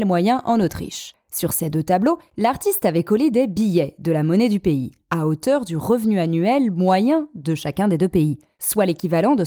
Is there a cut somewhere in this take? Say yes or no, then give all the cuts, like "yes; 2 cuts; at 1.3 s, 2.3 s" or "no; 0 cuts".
no; 0 cuts